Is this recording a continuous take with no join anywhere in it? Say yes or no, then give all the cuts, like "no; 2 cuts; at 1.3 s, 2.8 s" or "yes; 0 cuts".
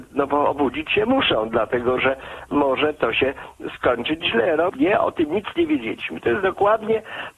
no; 1 cut; at 4.7 s